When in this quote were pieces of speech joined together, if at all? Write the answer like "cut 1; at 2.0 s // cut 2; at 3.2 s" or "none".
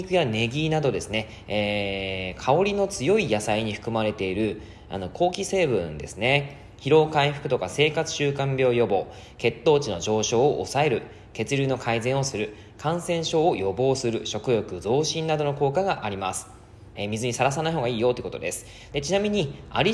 cut 1; at 17.0 s // cut 2; at 18.9 s